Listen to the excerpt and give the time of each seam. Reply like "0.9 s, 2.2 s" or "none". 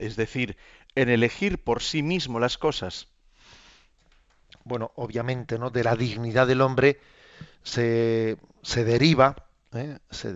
none